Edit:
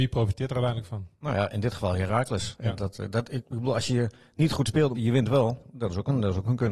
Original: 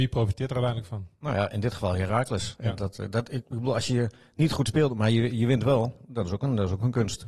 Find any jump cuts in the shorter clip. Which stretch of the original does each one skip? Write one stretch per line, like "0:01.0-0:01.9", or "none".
0:04.9-0:05.3